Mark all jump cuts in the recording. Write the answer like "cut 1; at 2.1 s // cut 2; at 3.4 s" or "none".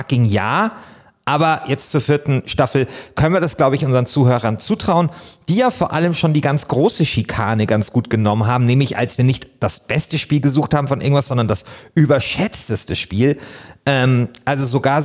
none